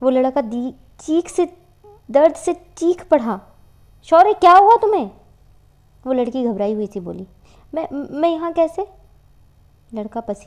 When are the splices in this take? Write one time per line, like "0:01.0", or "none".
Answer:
0:03.9

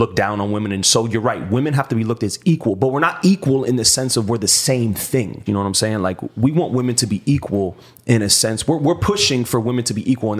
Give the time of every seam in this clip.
0:05.5

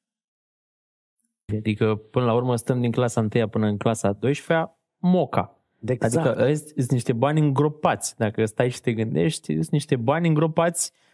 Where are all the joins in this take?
0:01.5

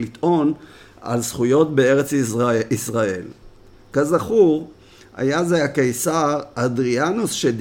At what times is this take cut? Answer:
none

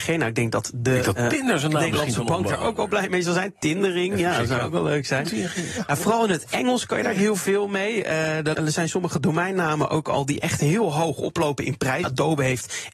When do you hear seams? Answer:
0:08.5
0:12.0

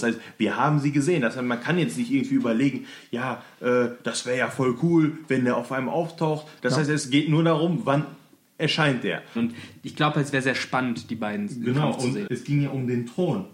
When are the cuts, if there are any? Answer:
0:06.6
0:09.4
0:12.3

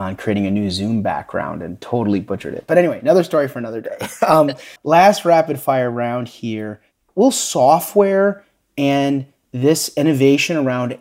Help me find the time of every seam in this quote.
0:04.8

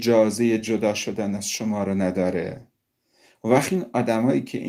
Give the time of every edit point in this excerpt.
none

